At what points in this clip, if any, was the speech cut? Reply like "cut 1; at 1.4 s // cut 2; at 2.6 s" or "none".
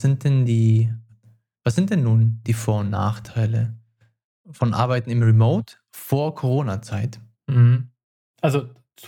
cut 1; at 7.3 s